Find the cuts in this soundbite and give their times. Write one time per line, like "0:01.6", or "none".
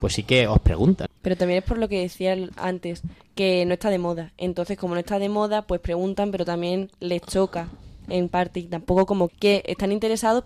0:01.1
0:09.3